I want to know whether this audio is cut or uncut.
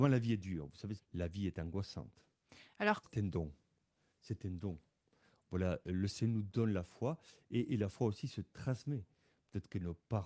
cut